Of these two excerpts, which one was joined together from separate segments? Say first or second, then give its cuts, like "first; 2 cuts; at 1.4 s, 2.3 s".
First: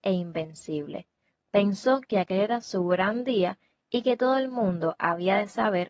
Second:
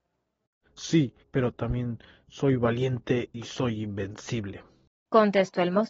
second; 1 cut; at 1.2 s